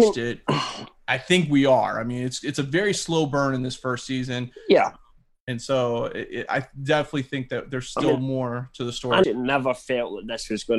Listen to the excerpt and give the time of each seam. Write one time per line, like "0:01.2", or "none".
0:09.2